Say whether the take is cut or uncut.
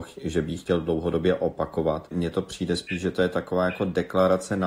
cut